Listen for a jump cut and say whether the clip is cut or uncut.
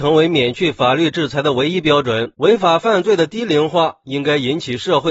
cut